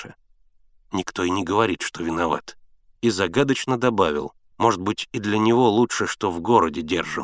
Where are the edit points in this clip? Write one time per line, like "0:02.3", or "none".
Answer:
0:03.0
0:04.5